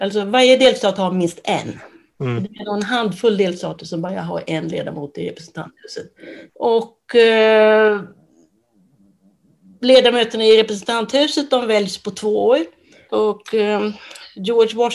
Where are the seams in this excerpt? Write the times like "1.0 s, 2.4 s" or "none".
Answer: 6.5 s, 13.1 s